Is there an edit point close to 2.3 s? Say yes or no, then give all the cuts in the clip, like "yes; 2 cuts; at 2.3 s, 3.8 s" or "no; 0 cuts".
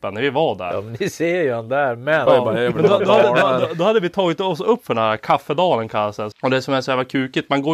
yes; 2 cuts; at 2.3 s, 6.3 s